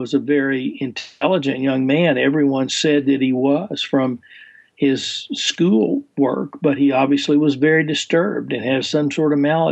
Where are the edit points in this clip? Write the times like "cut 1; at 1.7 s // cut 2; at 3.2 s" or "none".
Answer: none